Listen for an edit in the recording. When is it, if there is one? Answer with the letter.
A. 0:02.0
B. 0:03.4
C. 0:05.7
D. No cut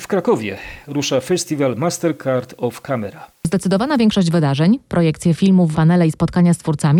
C